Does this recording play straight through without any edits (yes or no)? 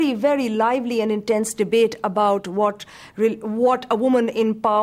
yes